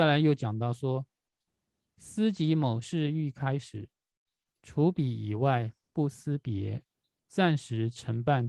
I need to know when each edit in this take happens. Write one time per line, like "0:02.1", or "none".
0:07.2